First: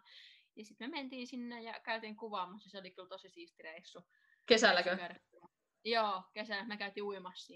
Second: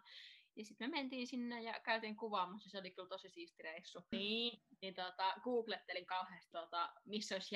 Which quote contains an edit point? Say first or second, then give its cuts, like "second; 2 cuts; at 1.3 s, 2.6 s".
second; 2 cuts; at 4.1 s, 6.5 s